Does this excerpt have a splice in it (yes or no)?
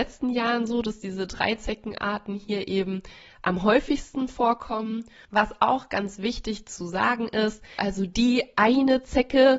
yes